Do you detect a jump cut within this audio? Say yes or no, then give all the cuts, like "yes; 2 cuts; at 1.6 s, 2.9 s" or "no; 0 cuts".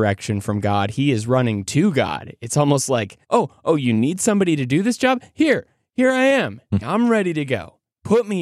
yes; 1 cut; at 6.8 s